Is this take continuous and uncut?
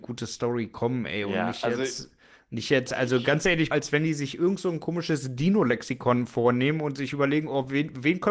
no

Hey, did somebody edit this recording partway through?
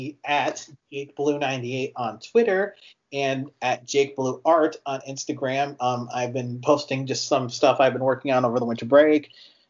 no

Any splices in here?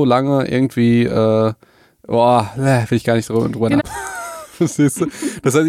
yes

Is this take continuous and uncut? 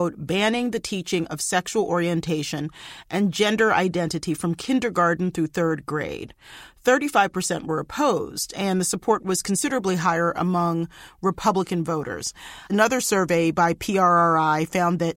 yes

